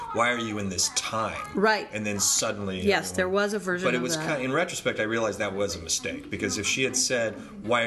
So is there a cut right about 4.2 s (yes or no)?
no